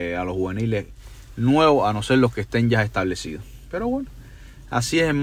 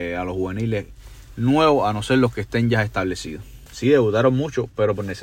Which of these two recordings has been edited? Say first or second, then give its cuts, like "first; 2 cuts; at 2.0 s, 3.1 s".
second; 1 cut; at 3.7 s